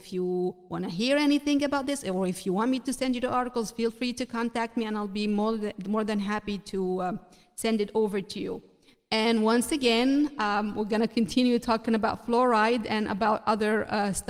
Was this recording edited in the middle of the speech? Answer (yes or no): no